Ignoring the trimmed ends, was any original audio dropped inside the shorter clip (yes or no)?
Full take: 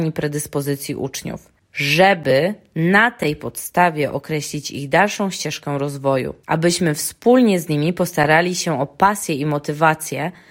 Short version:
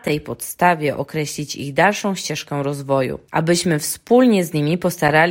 no